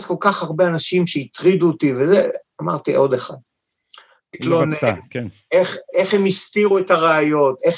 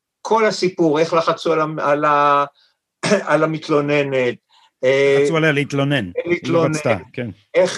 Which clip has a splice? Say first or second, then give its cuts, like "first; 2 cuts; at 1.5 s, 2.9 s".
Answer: first; 2 cuts; at 4.3 s, 5.9 s